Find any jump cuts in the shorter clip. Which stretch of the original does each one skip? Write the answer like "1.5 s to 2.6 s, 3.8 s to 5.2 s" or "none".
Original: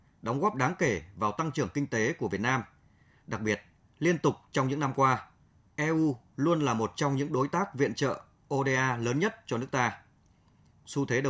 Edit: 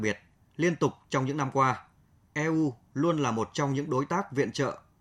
none

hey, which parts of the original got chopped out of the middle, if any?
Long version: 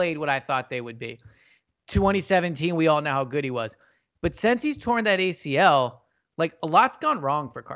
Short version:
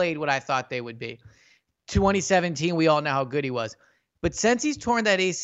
none

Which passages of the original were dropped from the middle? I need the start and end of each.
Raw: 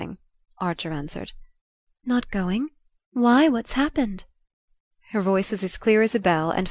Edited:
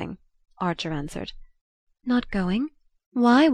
none

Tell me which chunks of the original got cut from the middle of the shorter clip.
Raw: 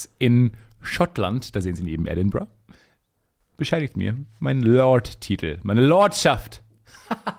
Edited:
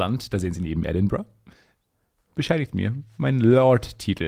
none

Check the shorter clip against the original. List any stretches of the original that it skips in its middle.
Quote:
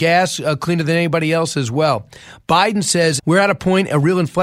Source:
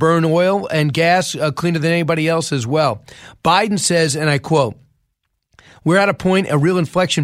4.1 s to 5.8 s

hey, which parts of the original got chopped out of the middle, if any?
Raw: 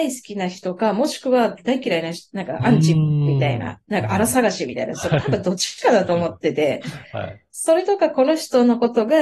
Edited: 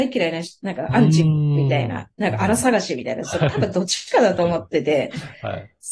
none

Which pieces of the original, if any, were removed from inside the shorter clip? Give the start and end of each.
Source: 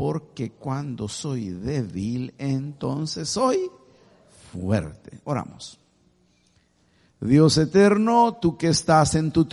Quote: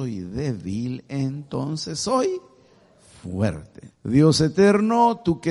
5.2 s to 7.1 s

